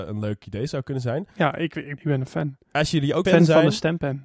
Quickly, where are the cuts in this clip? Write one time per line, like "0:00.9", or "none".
0:02.0
0:03.2